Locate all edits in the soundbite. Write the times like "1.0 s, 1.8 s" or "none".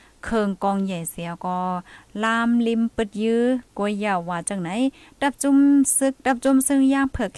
6.2 s